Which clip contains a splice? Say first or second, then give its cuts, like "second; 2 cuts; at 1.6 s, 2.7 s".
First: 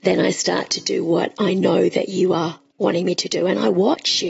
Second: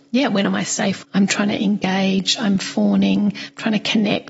second; 1 cut; at 1.0 s